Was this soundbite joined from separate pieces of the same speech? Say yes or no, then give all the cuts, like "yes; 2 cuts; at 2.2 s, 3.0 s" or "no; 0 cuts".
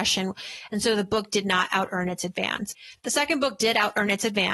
no; 0 cuts